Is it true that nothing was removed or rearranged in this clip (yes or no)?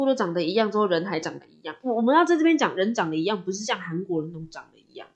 yes